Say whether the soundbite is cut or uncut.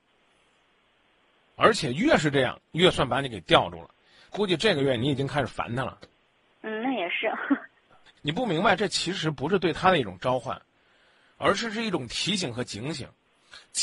cut